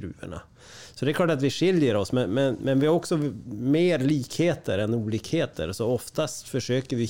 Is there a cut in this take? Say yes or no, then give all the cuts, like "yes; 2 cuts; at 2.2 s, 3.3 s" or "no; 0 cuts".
no; 0 cuts